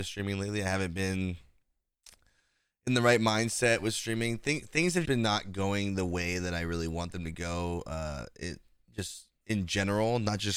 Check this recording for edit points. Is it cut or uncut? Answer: cut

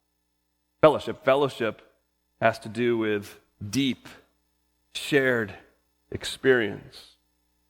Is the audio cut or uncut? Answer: uncut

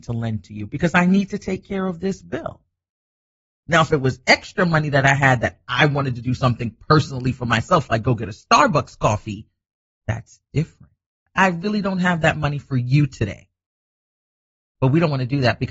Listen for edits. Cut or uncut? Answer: cut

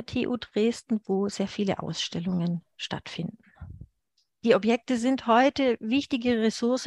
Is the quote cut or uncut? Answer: cut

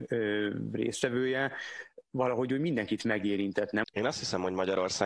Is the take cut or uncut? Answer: cut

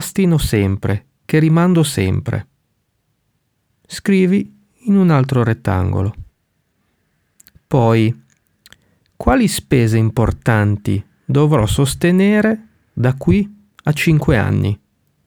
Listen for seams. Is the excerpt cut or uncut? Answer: uncut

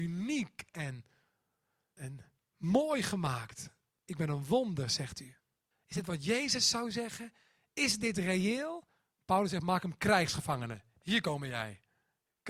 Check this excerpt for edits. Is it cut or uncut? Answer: cut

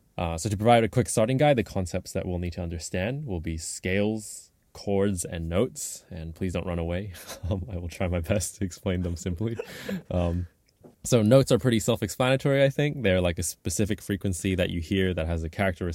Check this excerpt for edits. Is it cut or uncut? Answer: cut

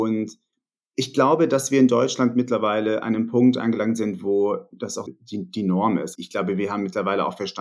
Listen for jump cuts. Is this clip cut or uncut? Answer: cut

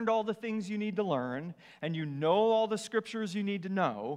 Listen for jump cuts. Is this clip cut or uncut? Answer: uncut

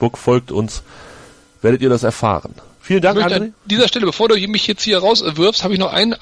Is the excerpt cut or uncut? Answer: uncut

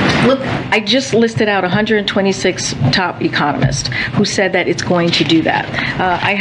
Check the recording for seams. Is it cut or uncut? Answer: uncut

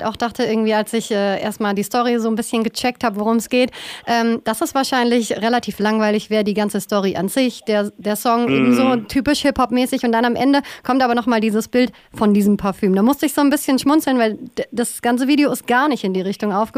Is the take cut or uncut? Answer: uncut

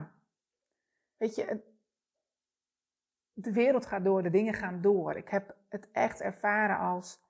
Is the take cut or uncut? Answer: uncut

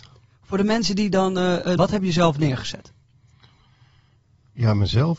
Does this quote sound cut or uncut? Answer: cut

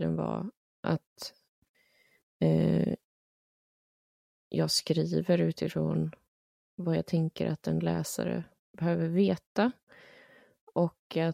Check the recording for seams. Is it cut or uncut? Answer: uncut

